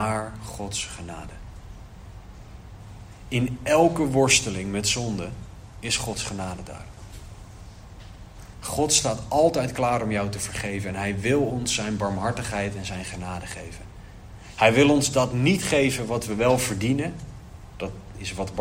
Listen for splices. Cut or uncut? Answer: cut